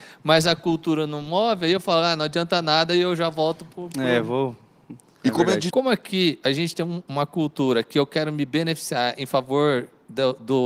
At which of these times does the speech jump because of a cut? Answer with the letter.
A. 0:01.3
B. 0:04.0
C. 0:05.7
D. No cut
C